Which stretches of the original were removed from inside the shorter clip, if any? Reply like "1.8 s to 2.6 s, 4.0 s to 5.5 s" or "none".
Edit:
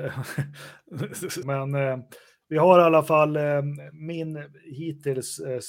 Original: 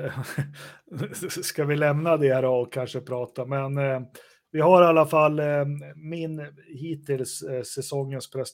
1.4 s to 3.5 s